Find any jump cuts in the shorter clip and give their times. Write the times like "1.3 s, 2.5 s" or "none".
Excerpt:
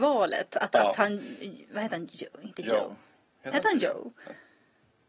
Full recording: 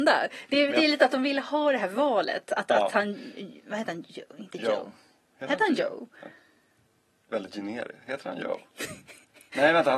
none

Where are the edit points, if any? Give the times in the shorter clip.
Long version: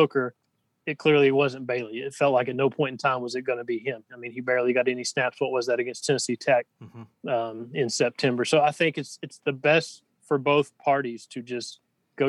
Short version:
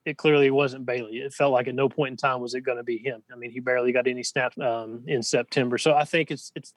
4.5 s

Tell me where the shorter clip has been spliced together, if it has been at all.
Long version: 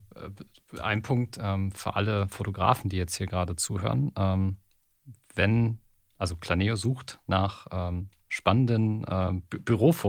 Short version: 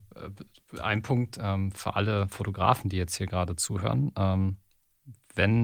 none

